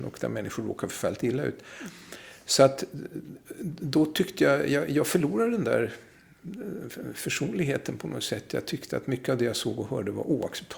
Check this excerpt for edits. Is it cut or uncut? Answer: uncut